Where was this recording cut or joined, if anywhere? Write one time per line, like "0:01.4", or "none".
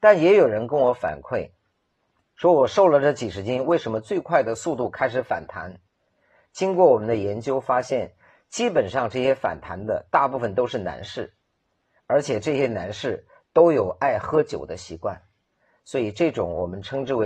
none